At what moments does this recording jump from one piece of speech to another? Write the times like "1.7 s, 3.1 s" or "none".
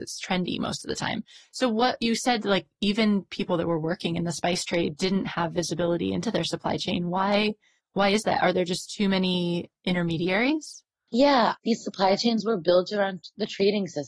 11.6 s

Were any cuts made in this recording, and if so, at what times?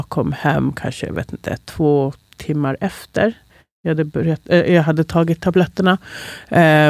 none

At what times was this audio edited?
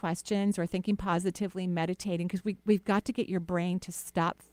none

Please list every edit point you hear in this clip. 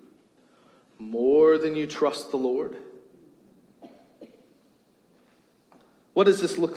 none

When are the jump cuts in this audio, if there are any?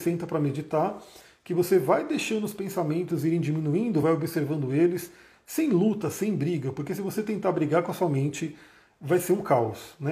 none

